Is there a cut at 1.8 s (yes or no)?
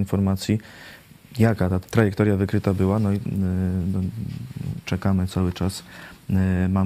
yes